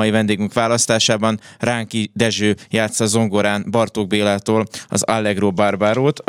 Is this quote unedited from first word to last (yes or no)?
yes